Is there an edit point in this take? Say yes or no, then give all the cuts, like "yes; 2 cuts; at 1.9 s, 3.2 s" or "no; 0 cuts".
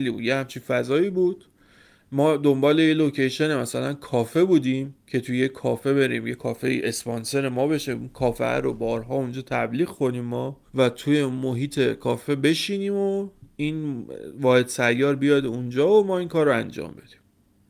yes; 2 cuts; at 5.0 s, 10.7 s